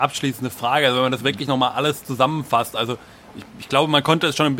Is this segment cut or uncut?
uncut